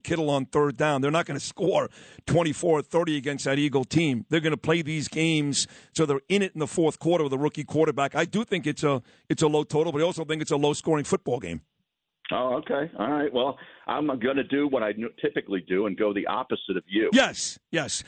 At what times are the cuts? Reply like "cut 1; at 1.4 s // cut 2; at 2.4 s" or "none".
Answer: none